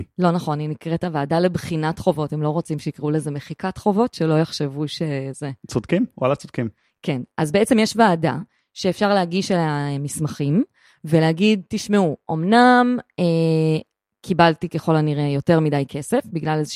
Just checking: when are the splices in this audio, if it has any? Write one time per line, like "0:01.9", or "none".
none